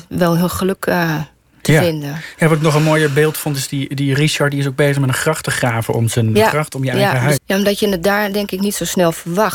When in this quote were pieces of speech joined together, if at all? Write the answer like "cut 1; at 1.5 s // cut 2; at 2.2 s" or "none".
cut 1; at 6.4 s // cut 2; at 7.4 s